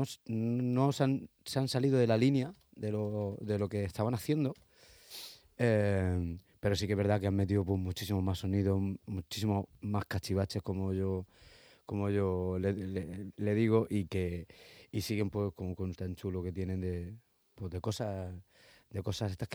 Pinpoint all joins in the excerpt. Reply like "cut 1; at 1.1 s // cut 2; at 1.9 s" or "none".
cut 1; at 15.9 s